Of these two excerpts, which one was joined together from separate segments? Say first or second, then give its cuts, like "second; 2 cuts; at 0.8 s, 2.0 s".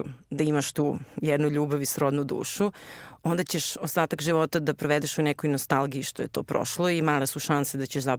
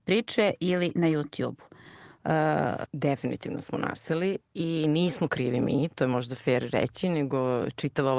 second; 1 cut; at 2.9 s